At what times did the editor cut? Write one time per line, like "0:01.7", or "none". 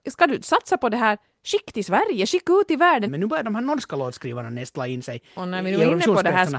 0:03.1